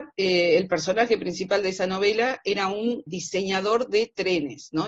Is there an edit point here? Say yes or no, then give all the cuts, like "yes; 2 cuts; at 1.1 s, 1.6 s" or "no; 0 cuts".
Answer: yes; 1 cut; at 3.1 s